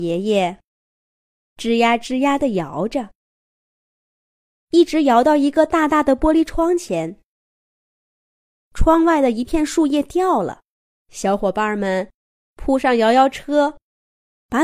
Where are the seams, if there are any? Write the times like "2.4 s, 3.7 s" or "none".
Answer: 8.6 s, 10.9 s